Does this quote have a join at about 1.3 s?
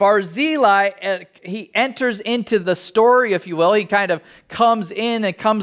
no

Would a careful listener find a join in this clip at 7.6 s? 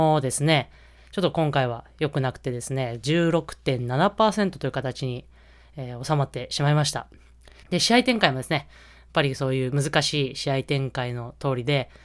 yes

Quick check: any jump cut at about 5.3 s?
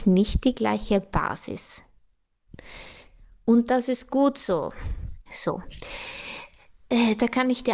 yes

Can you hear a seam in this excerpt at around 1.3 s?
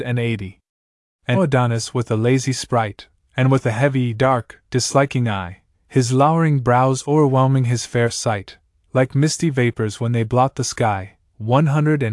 yes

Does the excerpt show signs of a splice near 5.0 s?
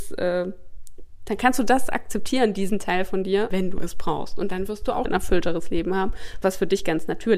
yes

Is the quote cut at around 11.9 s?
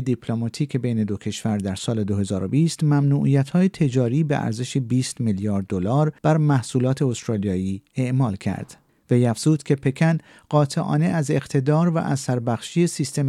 no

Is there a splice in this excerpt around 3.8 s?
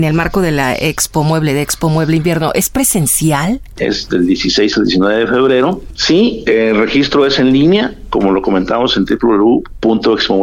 yes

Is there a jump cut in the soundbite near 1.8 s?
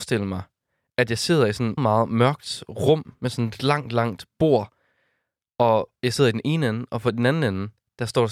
yes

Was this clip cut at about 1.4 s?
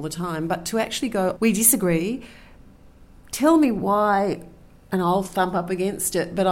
yes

